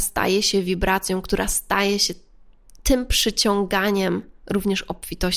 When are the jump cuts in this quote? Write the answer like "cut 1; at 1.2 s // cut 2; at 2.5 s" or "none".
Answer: cut 1; at 4.4 s